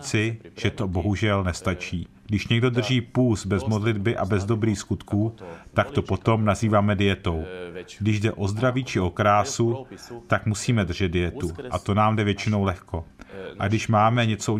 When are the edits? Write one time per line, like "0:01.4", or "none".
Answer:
0:02.2